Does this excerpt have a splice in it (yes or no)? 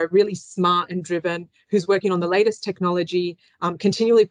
no